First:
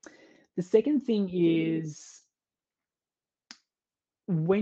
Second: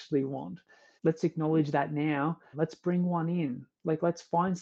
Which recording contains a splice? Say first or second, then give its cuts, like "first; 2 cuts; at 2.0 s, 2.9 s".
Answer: second; 2 cuts; at 1.0 s, 2.5 s